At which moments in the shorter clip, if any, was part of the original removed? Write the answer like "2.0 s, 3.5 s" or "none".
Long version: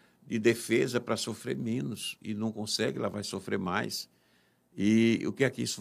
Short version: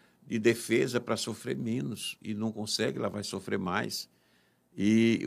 none